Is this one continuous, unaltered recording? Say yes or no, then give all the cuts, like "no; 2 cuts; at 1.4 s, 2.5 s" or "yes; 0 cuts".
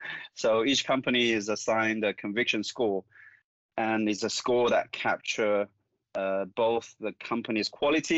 yes; 0 cuts